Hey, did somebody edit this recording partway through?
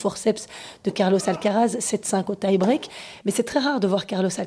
yes; 1 cut; at 3.2 s

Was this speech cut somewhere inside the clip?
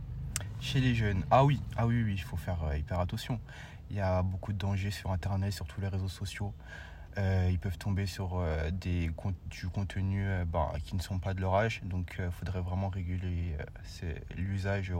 no; 0 cuts

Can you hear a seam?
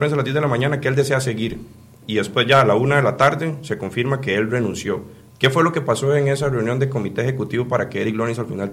no; 0 cuts

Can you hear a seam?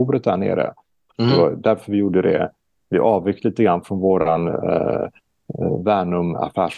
no; 0 cuts

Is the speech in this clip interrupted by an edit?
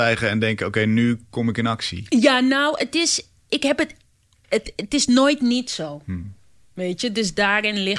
no; 0 cuts

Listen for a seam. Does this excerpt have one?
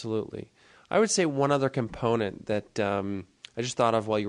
no; 0 cuts

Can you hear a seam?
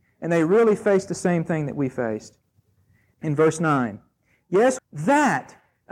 yes; 2 cuts; at 3.1 s, 4.8 s

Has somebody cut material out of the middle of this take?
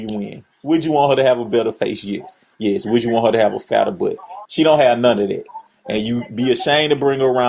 yes; 2 cuts; at 2.5 s, 4.4 s

